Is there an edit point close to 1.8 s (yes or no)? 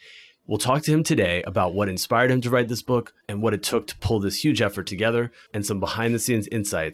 no